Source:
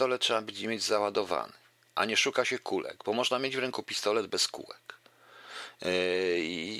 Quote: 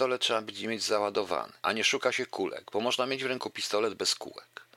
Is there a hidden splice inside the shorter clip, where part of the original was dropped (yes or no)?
yes